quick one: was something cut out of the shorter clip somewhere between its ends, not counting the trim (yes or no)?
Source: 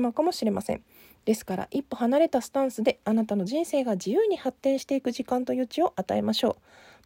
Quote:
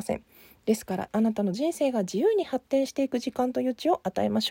yes